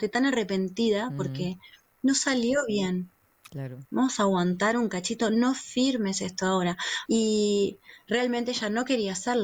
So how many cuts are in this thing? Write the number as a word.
two